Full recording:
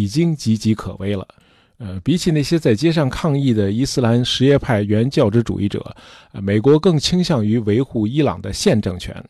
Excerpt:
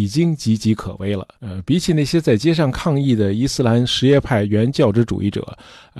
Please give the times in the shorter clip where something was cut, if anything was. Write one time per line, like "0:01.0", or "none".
0:01.3